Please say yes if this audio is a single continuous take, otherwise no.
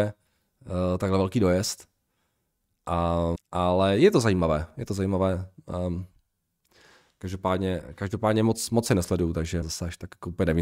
no